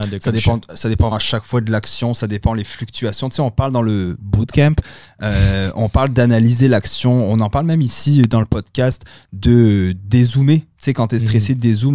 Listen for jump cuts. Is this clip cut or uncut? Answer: cut